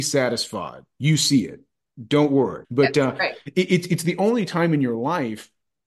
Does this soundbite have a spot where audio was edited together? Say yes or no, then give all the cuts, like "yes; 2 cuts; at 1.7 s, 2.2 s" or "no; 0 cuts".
yes; 1 cut; at 2.6 s